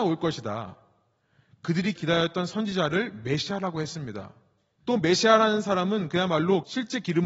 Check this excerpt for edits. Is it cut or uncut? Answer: uncut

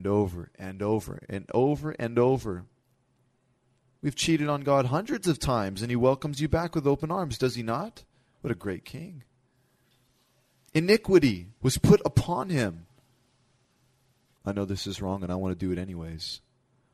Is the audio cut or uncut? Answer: cut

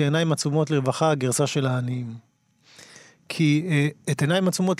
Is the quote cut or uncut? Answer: uncut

